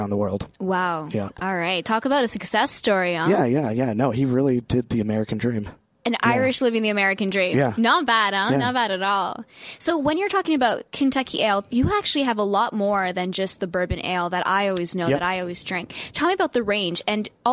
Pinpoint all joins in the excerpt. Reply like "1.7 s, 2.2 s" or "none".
none

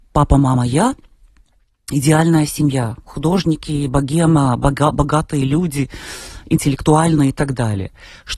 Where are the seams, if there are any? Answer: none

